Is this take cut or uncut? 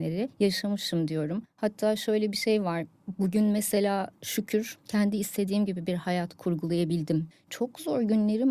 cut